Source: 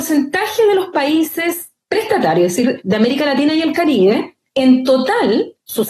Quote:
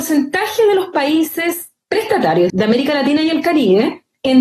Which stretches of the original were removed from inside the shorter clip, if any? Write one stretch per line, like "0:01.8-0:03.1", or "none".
0:02.5-0:02.8